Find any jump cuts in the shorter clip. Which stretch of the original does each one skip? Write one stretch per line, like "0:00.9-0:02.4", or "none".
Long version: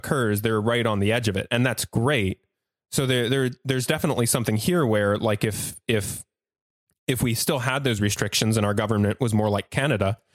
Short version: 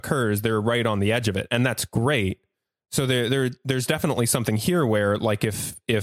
none